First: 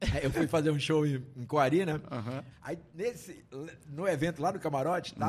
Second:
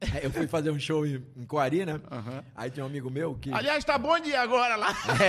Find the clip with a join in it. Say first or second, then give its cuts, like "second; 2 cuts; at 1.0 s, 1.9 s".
first; 1 cut; at 2.5 s